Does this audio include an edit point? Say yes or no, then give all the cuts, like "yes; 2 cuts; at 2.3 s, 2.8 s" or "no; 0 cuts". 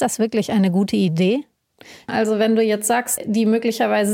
yes; 2 cuts; at 2.1 s, 3.2 s